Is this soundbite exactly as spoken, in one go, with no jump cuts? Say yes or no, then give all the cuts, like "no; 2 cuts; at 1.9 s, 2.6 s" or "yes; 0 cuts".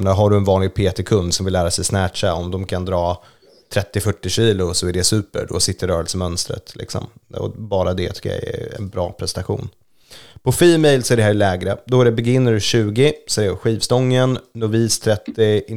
yes; 0 cuts